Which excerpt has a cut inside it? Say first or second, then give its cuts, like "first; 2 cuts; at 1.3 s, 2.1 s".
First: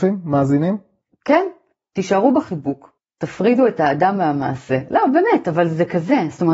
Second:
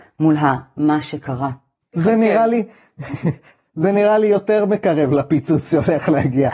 second; 1 cut; at 1.9 s